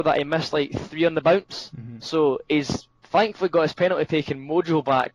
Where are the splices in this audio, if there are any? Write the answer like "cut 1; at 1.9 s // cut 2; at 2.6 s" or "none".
none